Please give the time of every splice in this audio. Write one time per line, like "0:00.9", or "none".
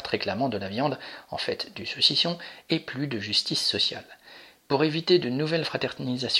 none